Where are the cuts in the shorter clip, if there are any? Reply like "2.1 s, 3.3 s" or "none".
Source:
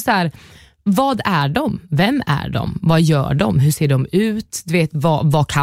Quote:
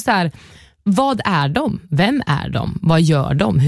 none